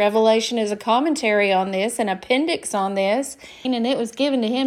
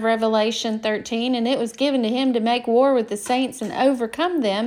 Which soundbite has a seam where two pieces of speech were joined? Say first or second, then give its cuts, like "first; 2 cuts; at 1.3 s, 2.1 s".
first; 1 cut; at 3.6 s